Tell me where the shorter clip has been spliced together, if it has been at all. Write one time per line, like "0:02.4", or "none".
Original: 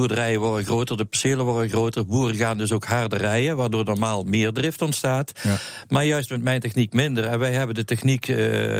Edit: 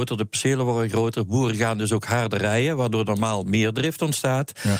none